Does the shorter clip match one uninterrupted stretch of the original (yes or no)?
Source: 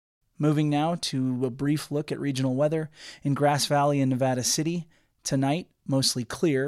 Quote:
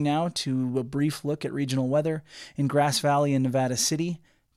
yes